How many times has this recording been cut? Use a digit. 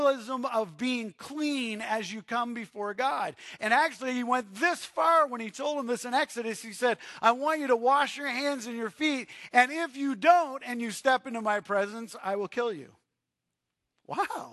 0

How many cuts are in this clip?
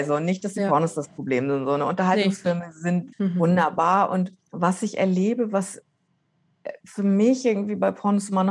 2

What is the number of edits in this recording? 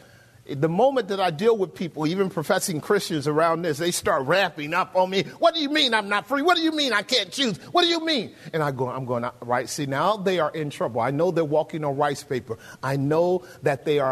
0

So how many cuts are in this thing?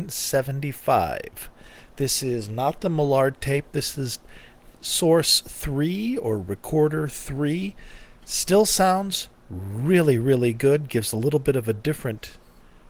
1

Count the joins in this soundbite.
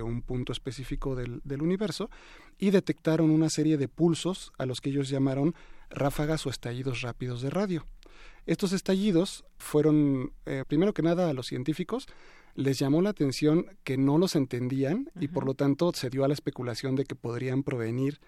2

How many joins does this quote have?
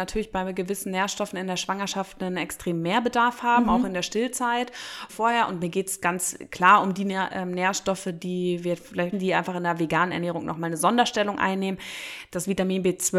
2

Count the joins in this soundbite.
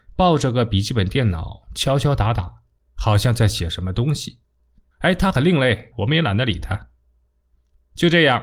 2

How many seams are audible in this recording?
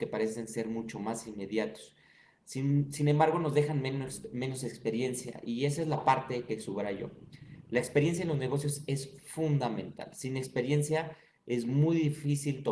0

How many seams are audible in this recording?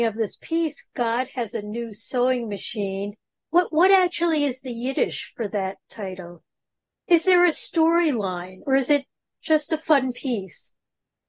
2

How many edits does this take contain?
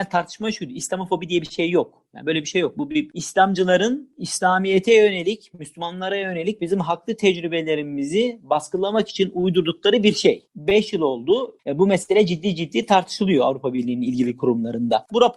0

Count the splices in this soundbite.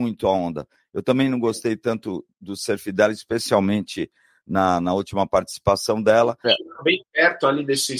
1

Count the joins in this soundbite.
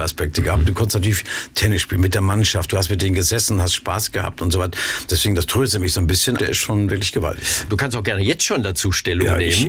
3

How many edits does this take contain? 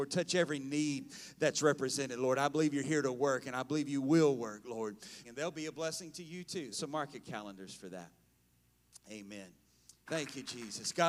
3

